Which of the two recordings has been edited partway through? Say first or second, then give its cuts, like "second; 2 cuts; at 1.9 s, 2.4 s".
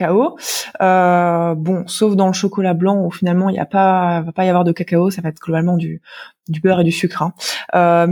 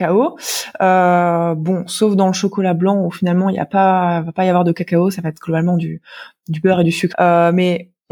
second; 1 cut; at 7.1 s